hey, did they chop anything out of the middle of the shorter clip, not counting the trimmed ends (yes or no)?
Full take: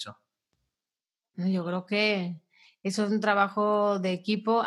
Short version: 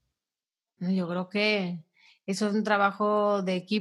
no